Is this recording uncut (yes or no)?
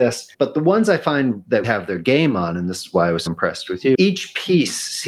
no